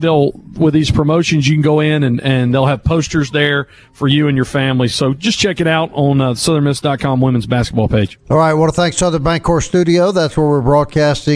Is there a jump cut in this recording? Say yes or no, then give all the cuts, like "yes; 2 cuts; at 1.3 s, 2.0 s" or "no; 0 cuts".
no; 0 cuts